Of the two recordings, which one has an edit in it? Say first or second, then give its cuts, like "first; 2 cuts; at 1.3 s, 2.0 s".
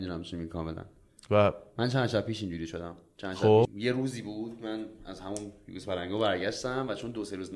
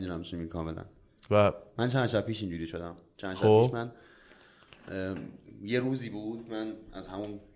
first; 1 cut; at 3.6 s